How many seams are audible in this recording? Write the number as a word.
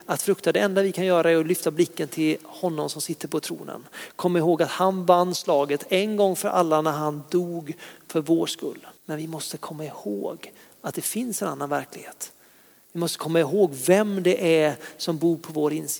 one